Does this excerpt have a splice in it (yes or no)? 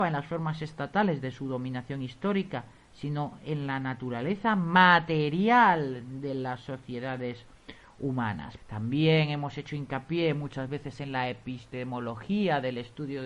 yes